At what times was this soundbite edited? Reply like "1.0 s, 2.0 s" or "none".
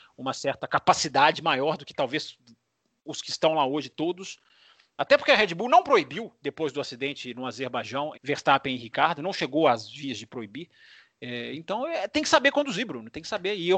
8.1 s